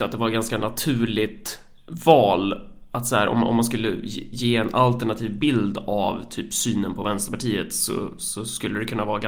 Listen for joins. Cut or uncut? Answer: uncut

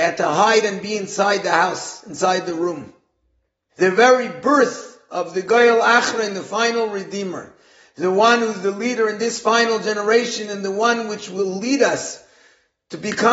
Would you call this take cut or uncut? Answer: cut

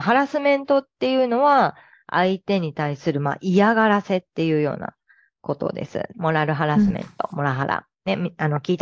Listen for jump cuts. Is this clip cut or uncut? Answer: cut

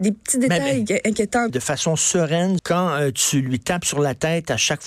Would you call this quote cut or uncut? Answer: cut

